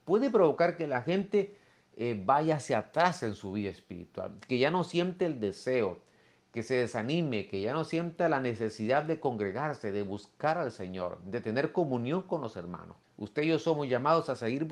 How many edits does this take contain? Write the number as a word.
one